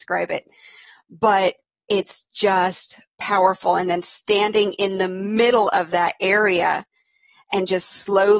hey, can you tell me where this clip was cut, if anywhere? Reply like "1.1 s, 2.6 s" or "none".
none